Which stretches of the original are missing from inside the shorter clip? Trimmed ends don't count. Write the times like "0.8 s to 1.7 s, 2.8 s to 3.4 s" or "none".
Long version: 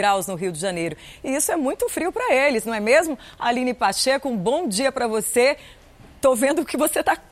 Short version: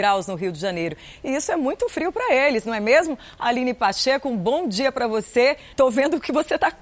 5.7 s to 6.2 s